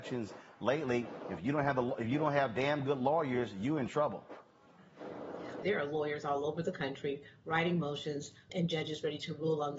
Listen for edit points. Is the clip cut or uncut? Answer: cut